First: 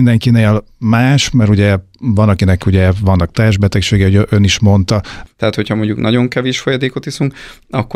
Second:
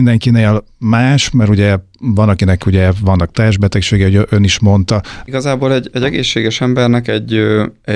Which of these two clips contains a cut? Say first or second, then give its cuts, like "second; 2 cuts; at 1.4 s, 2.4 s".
first; 1 cut; at 5.3 s